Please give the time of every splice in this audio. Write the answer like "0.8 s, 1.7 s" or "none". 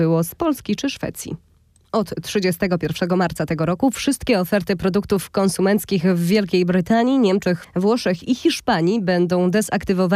7.6 s